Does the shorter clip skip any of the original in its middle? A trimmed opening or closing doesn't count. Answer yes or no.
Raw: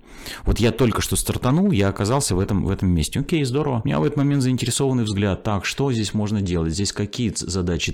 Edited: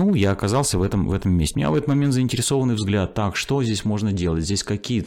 yes